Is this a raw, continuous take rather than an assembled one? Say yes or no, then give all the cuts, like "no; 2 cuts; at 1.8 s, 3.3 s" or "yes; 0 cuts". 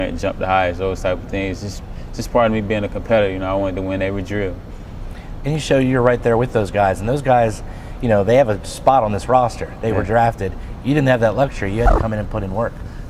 no; 1 cut; at 5.4 s